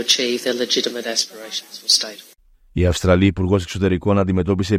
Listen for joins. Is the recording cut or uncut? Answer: uncut